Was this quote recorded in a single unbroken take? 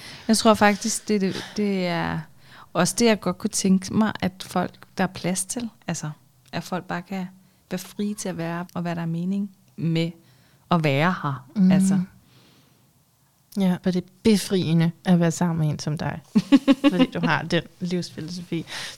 no; 2 cuts; at 8.7 s, 13.8 s

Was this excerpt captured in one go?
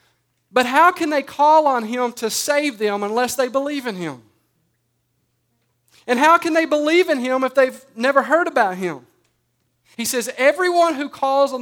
no; 1 cut; at 9.9 s

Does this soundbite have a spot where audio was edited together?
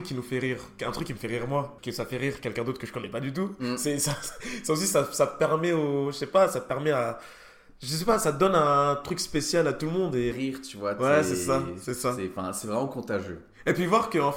yes; 1 cut; at 10.3 s

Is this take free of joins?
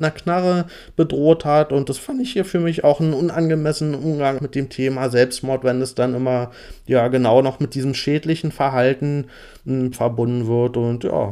no; 2 cuts; at 4.4 s, 9.9 s

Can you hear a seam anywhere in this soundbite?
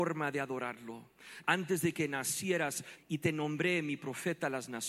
yes; 2 cuts; at 1.4 s, 3.0 s

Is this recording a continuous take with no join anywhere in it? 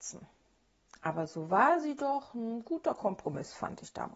yes; 0 cuts

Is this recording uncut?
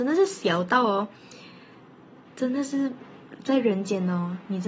yes; 0 cuts

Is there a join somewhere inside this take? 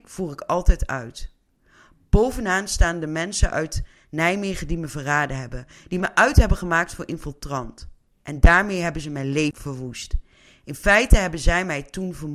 no; 0 cuts

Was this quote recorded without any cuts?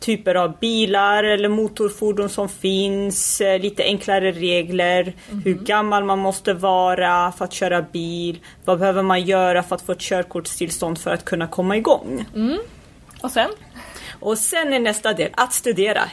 yes; 0 cuts

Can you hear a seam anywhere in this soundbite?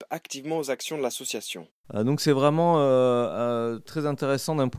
yes; 1 cut; at 1.8 s

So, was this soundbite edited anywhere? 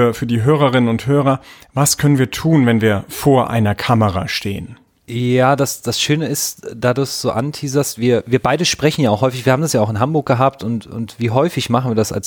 no; 0 cuts

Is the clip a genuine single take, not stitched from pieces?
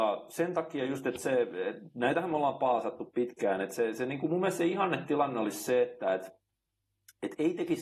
yes; 0 cuts

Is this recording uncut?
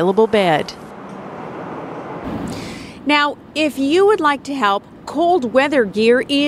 yes; 0 cuts

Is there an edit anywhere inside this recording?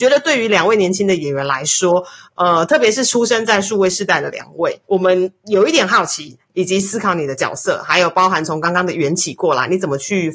yes; 2 cuts; at 4.8 s, 6.4 s

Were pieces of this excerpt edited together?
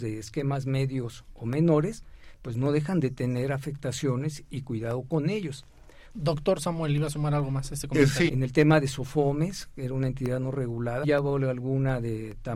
yes; 3 cuts; at 6.1 s, 8.3 s, 11.0 s

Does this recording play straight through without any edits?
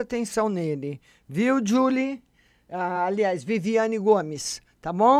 yes; 0 cuts

